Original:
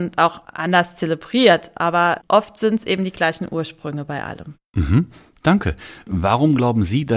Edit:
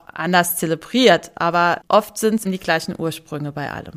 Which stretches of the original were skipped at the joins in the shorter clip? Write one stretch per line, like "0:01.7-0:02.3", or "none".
0:02.8-0:03.0